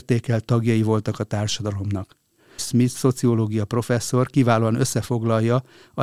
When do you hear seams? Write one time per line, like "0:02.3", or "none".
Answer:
0:02.6